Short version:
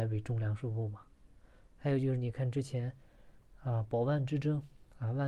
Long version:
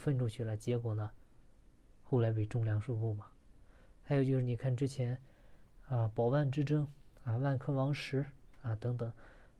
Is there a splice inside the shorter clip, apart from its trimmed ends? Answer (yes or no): no